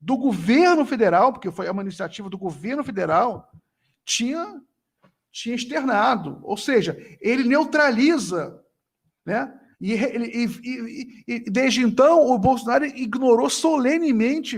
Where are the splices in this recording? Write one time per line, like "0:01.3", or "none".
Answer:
0:09.7